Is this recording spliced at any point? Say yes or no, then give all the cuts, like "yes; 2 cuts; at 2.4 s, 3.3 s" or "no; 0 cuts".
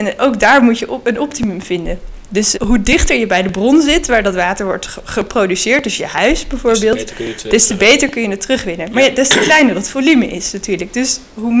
yes; 1 cut; at 2.5 s